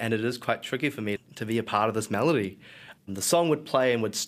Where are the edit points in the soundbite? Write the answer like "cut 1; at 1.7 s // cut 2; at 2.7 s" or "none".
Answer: cut 1; at 1.2 s // cut 2; at 3.0 s